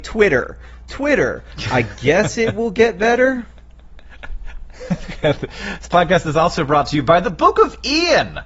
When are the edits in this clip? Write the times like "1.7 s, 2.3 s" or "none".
none